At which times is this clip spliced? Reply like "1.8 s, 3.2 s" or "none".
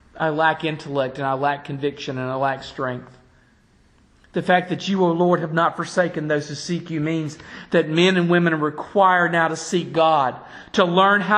none